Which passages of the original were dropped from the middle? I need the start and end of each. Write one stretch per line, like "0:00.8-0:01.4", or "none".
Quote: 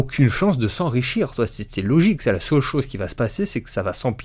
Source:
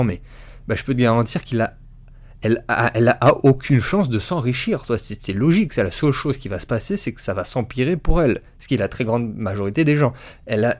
none